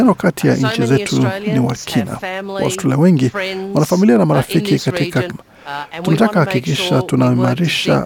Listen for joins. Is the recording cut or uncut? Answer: cut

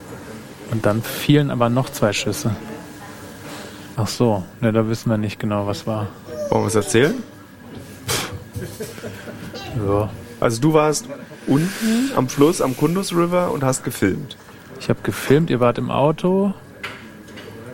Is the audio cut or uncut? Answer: cut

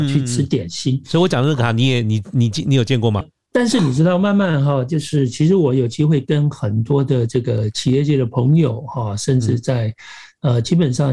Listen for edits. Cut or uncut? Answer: cut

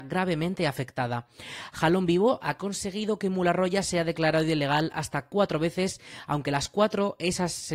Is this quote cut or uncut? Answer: cut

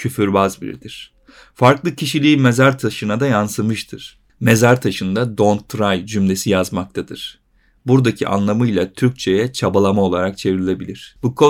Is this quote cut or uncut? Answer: uncut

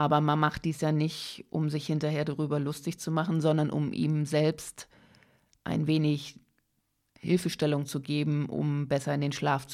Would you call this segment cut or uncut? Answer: uncut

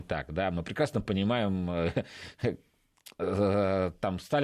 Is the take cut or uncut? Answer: uncut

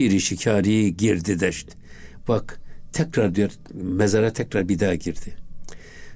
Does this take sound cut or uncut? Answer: uncut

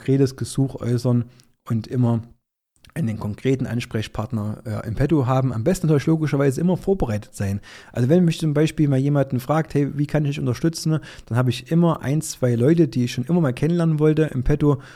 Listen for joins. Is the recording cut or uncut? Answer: uncut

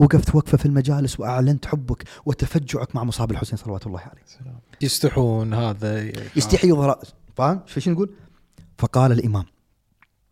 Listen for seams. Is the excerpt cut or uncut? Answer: cut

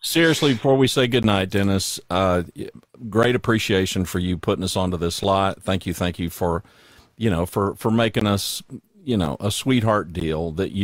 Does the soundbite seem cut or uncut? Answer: uncut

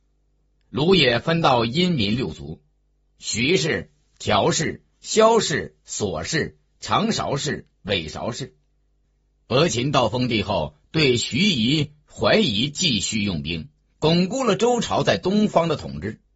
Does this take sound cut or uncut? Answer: uncut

